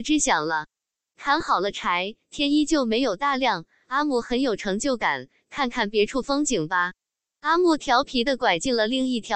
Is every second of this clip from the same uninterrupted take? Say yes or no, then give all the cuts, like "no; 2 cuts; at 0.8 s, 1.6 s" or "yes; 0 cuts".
yes; 0 cuts